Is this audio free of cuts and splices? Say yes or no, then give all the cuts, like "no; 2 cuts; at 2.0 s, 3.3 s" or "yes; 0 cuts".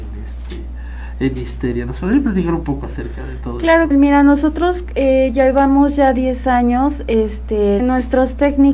no; 2 cuts; at 3.9 s, 7.8 s